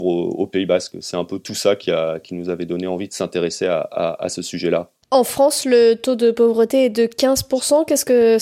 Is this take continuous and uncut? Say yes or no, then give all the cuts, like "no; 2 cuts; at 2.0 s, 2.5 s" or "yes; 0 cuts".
yes; 0 cuts